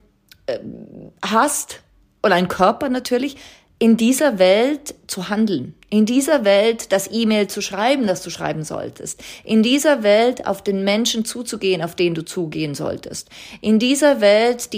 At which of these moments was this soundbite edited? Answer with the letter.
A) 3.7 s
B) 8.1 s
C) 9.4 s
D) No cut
D